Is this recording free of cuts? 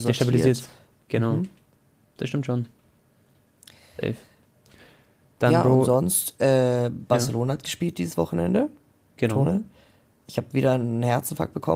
yes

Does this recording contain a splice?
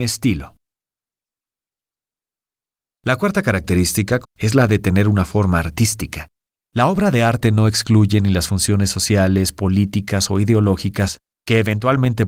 yes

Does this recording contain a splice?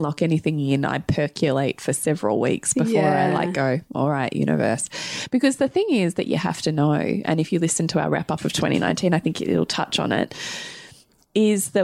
no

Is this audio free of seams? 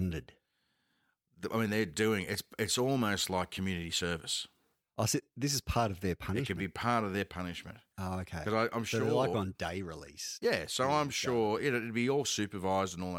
yes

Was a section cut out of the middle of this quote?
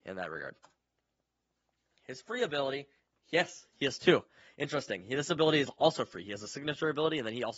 no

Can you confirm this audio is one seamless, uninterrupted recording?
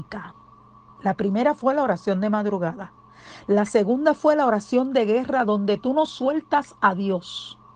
yes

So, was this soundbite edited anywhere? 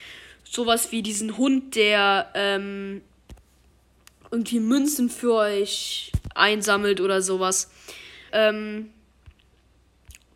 yes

